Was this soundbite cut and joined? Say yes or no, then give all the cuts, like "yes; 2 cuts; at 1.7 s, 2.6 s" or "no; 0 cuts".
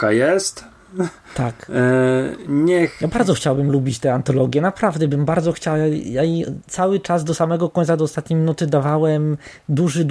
no; 0 cuts